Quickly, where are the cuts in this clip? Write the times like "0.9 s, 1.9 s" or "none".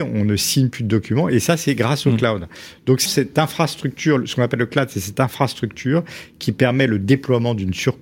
3.1 s